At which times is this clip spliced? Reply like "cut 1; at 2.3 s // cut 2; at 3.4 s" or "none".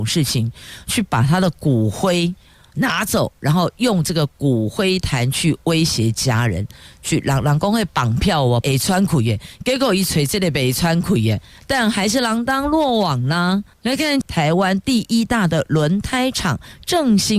cut 1; at 8.6 s // cut 2; at 14.2 s